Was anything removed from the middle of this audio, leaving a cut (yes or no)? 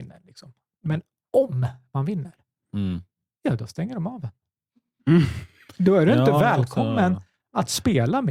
no